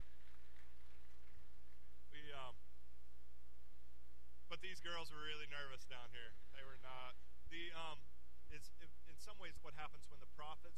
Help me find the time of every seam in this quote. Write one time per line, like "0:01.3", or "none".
0:07.5
0:08.5
0:09.6